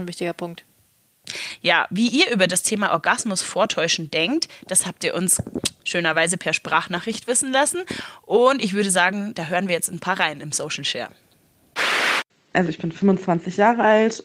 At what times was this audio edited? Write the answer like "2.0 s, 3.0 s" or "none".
none